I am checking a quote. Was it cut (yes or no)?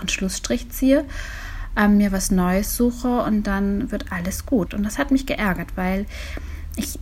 yes